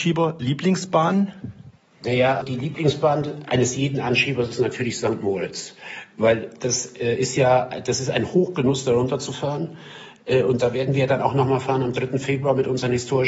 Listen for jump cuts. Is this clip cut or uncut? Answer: cut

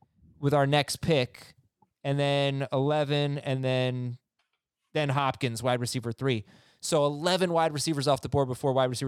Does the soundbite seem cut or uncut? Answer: uncut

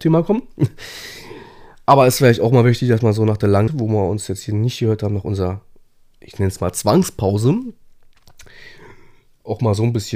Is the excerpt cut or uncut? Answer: cut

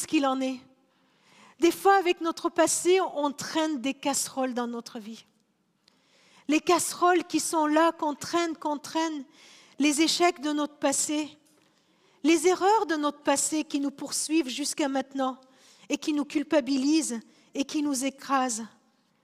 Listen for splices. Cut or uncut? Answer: uncut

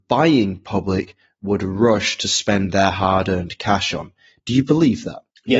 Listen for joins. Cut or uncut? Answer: uncut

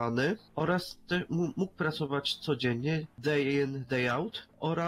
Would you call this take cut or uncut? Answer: uncut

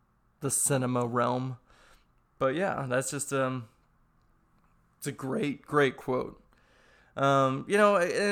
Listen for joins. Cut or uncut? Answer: cut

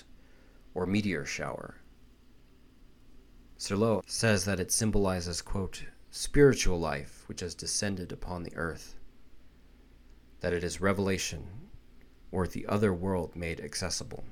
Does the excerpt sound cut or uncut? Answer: cut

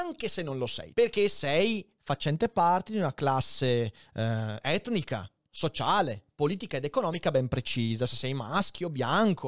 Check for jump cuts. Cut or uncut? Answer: cut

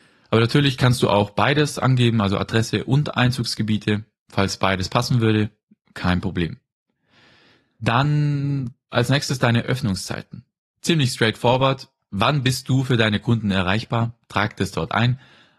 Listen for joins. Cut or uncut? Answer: uncut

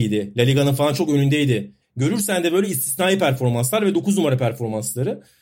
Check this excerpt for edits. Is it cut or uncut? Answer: cut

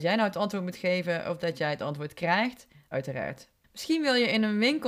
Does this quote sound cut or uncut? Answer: cut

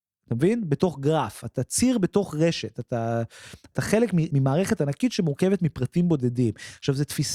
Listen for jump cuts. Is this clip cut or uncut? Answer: uncut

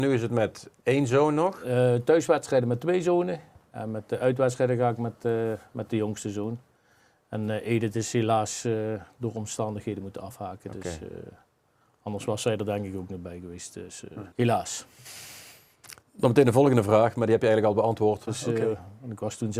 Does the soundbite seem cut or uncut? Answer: cut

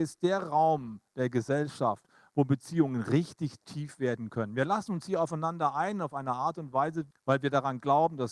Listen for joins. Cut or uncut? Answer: cut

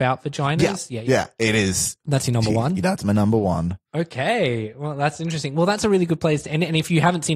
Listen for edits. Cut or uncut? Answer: cut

